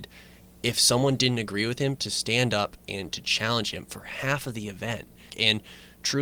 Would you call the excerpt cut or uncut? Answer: cut